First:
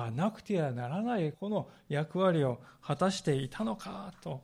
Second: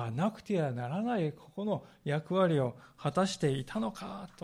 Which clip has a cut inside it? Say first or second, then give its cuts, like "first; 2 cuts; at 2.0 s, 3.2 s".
first; 1 cut; at 1.3 s